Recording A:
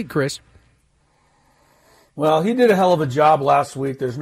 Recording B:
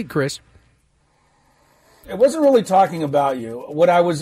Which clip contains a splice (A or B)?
B